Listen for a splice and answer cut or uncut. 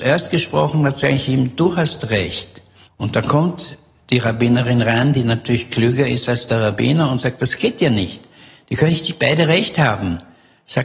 cut